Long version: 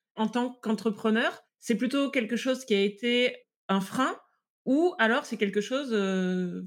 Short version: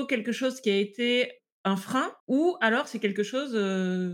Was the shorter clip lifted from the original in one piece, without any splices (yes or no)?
no